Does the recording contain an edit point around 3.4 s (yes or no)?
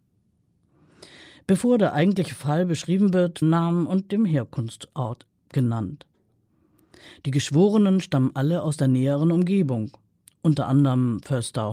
yes